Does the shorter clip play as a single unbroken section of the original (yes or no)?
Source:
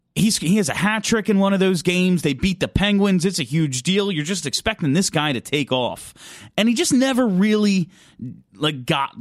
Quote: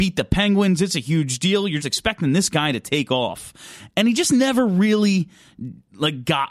no